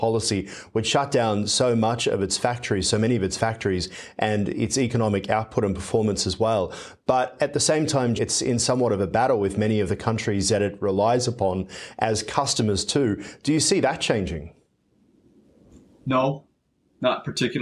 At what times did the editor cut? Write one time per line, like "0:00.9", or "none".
0:08.2